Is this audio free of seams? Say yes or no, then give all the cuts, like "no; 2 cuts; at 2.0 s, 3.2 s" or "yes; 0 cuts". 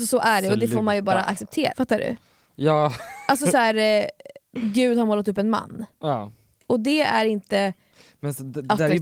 no; 1 cut; at 1.7 s